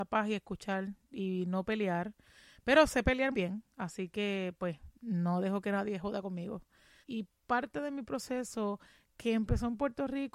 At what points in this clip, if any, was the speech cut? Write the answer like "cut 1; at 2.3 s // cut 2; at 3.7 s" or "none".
cut 1; at 3.3 s // cut 2; at 7.0 s